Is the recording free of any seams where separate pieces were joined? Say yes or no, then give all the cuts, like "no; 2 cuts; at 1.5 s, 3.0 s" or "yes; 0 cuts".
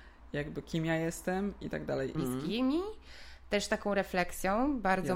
no; 1 cut; at 2.2 s